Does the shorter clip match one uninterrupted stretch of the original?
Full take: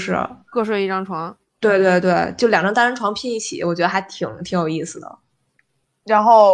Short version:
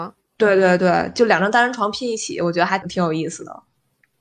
no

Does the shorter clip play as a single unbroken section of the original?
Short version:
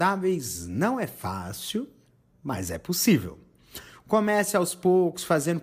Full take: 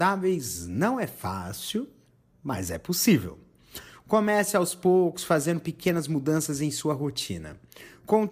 yes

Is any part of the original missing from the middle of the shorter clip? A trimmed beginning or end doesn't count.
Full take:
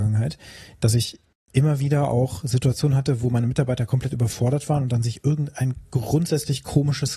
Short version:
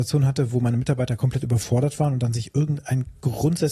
no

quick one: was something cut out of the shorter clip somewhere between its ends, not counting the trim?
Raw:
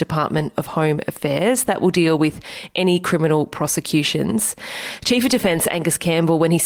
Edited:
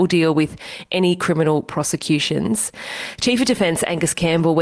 no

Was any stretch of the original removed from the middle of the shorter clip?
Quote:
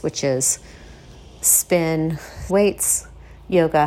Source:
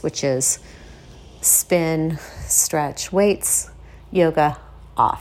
yes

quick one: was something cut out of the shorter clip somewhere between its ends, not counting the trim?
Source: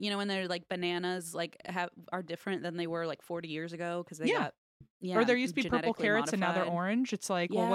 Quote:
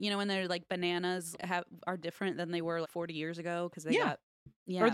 yes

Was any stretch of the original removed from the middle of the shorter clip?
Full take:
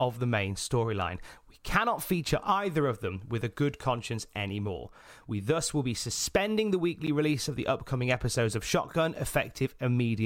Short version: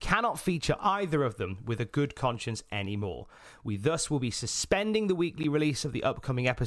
no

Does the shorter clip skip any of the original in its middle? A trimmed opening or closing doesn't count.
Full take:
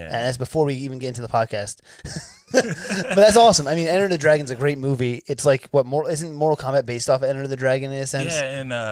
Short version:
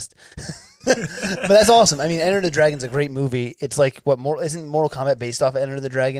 no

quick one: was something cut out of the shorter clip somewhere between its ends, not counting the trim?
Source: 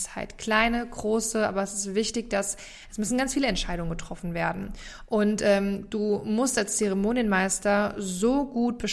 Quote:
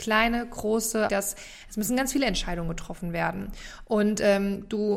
yes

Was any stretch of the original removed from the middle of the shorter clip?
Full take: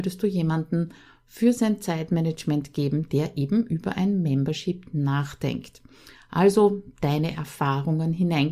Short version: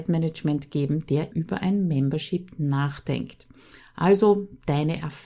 yes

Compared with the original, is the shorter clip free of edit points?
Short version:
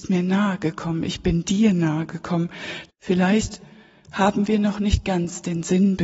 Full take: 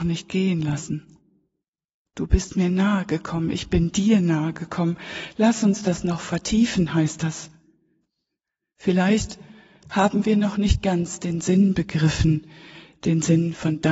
no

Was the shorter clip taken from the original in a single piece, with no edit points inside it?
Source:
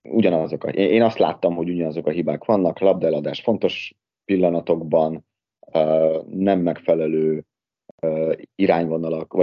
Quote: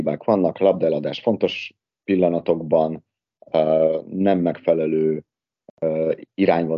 yes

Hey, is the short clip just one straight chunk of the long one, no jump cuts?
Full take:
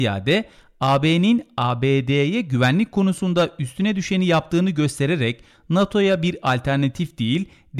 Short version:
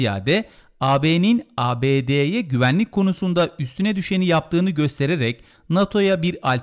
yes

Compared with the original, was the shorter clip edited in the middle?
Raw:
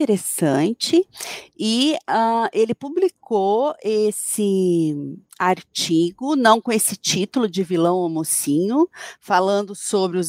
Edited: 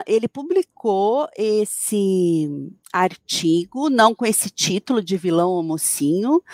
no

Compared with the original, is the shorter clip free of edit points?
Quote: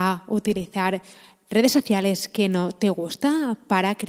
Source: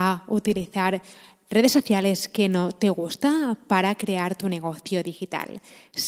yes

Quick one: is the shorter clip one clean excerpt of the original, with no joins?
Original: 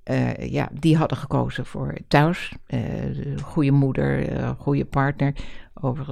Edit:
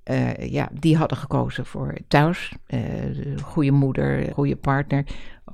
no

